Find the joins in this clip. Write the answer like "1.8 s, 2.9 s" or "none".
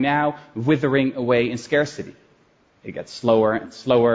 2.7 s